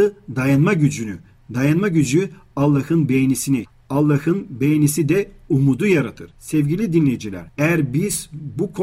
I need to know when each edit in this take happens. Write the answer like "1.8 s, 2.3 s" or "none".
none